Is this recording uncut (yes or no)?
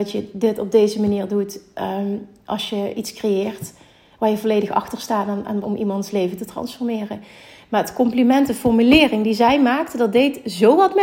no